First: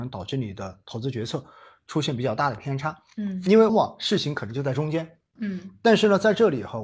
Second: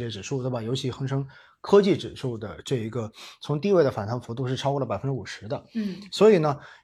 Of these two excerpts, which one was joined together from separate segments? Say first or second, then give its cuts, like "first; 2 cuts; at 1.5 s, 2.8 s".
first; 2 cuts; at 3.7 s, 5.4 s